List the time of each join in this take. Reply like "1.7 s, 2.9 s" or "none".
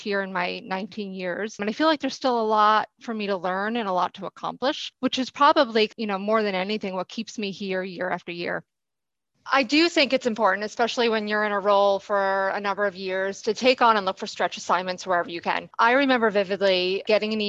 none